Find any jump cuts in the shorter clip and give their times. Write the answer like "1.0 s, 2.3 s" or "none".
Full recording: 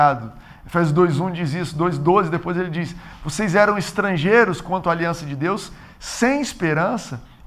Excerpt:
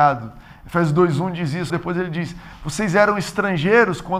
1.7 s